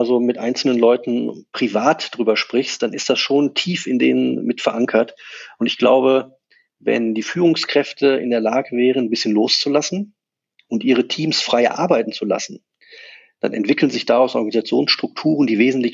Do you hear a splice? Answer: no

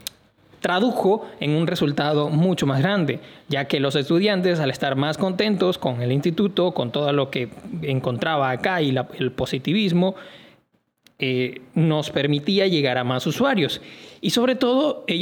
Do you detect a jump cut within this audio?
no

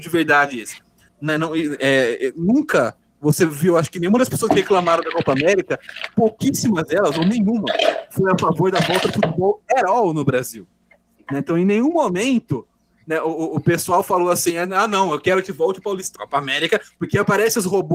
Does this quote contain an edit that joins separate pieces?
yes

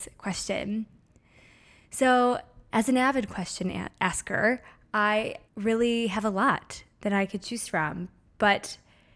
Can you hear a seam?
yes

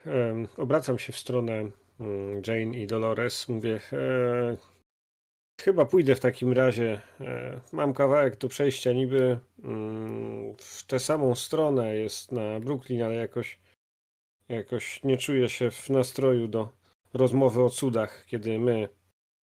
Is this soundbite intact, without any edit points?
yes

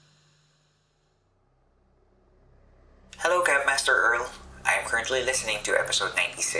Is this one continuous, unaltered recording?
yes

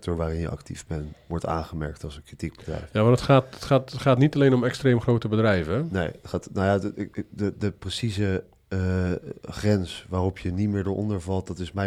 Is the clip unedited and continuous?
yes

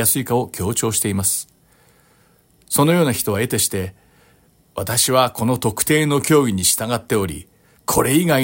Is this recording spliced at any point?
no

